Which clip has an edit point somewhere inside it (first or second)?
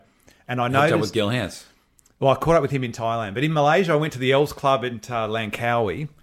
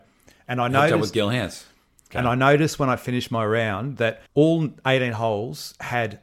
second